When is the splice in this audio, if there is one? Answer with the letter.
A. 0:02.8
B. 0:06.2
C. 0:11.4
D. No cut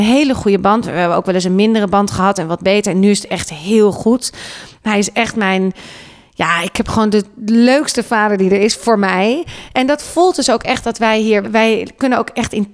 C